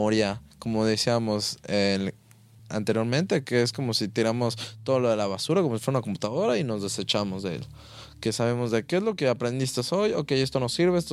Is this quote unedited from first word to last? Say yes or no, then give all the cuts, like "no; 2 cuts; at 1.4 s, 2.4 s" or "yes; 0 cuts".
yes; 0 cuts